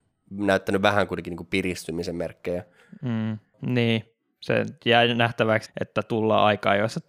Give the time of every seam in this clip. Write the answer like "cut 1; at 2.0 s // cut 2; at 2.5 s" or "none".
cut 1; at 3.5 s // cut 2; at 5.7 s